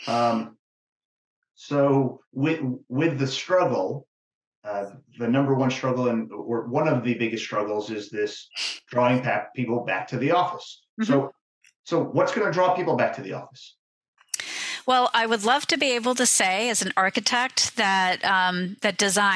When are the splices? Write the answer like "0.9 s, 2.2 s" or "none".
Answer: none